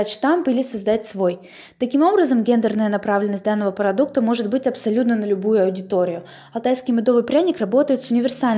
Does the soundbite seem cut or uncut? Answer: uncut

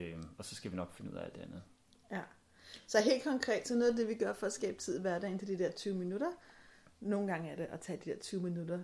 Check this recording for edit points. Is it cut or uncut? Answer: uncut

